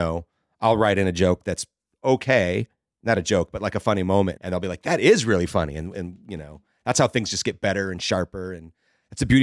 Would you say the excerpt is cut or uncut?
cut